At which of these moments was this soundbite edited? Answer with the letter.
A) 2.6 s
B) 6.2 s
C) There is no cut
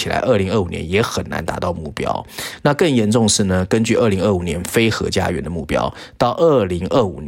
A